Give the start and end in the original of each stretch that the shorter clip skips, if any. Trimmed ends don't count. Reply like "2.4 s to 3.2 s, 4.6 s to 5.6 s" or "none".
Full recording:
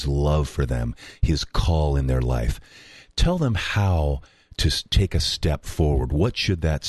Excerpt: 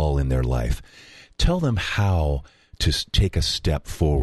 none